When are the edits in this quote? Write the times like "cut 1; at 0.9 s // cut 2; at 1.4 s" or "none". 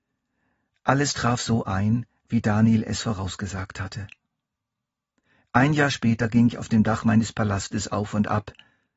none